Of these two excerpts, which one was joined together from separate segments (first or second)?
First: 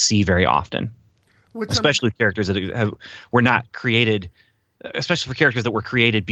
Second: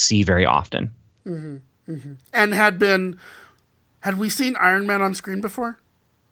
second